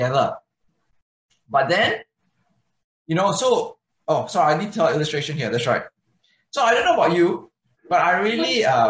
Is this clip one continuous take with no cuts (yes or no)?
yes